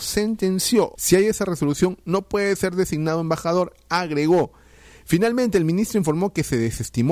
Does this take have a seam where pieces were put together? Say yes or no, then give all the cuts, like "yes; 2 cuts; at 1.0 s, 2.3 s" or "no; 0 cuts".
yes; 1 cut; at 1.0 s